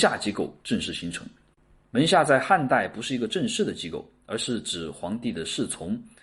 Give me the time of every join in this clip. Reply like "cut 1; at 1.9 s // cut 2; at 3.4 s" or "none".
cut 1; at 1.8 s